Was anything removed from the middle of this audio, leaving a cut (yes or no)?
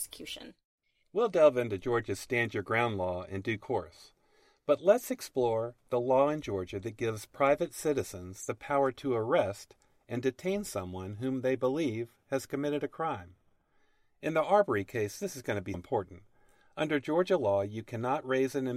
yes